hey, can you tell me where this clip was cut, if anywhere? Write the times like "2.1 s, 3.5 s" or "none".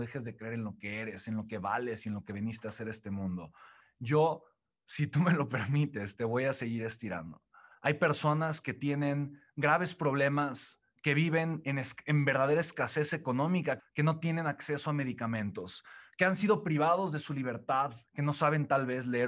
7.7 s, 13.8 s, 18.1 s

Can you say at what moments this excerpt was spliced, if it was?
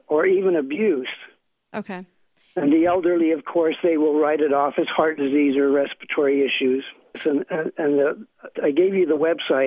7.1 s, 8.6 s

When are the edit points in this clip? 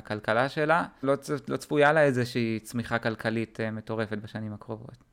1.0 s

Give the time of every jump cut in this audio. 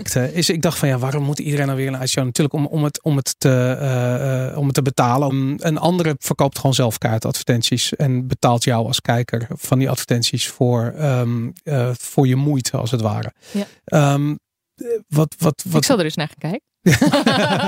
5.3 s

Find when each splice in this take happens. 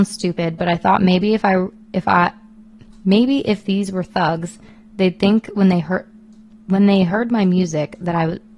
none

